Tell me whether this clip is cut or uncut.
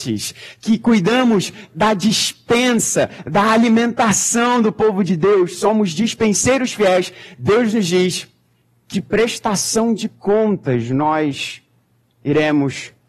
cut